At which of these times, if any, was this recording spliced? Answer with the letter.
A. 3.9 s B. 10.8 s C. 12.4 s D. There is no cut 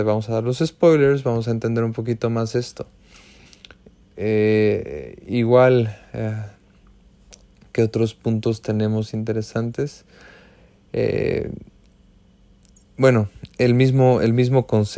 D